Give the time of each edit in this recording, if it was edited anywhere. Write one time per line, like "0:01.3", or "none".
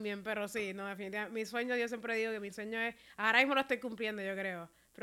none